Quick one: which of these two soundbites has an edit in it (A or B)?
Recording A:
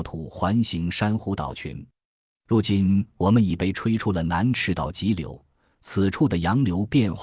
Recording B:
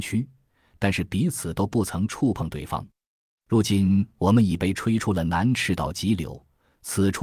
B